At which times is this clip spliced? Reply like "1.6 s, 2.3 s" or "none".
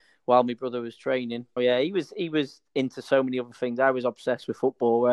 1.6 s